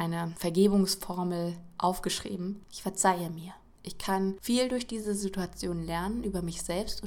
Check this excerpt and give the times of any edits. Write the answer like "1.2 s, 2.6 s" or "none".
2.6 s